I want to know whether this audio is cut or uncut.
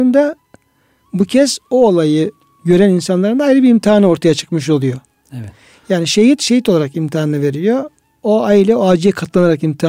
uncut